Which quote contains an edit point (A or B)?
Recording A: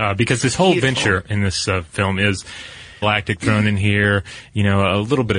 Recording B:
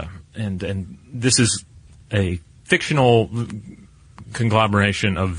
A